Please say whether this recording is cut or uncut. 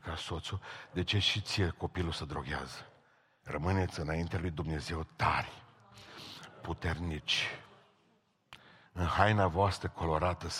cut